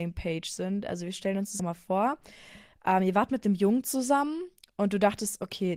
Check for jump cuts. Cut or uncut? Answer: cut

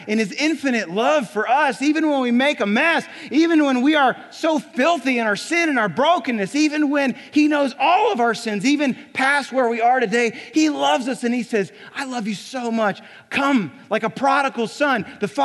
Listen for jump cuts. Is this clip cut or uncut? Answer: uncut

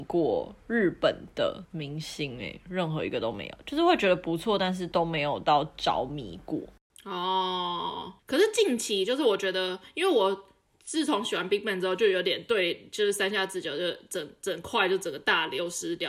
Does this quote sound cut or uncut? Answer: uncut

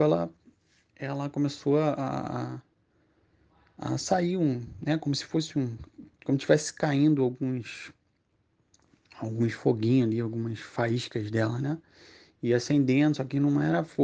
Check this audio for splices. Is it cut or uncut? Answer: uncut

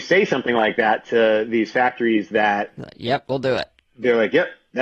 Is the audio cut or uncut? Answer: uncut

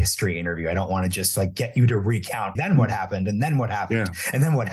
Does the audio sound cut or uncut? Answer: cut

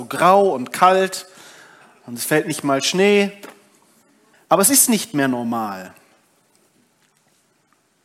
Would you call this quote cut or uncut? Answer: cut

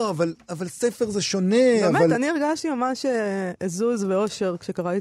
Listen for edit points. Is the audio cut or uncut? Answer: uncut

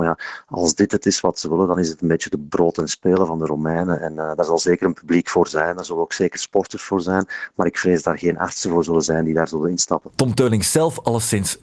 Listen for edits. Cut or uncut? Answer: uncut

